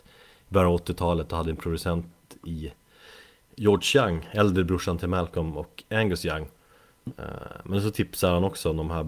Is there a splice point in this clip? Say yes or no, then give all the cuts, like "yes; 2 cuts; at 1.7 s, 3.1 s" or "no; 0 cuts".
yes; 1 cut; at 7.1 s